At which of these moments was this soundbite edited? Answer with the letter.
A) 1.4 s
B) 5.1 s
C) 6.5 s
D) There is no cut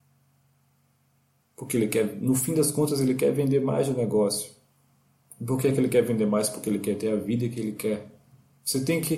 A